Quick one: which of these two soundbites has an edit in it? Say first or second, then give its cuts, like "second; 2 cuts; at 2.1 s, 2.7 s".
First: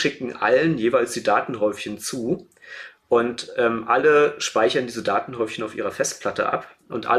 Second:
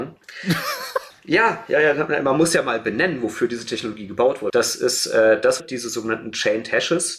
second; 3 cuts; at 1.1 s, 4.5 s, 5.6 s